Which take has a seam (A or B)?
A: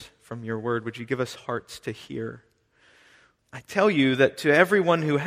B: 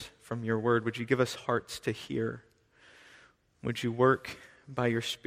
A